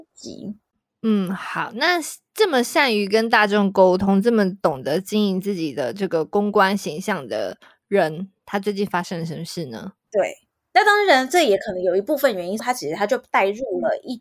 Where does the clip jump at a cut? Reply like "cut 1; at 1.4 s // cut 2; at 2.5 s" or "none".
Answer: cut 1; at 10.0 s // cut 2; at 12.6 s